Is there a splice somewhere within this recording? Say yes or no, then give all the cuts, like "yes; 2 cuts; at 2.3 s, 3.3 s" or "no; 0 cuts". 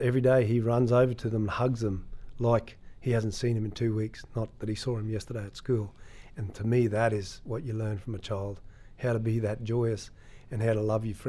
no; 0 cuts